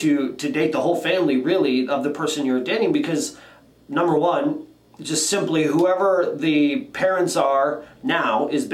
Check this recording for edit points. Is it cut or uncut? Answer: uncut